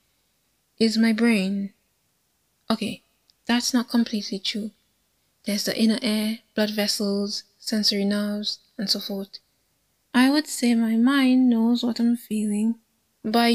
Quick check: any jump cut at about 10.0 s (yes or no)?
yes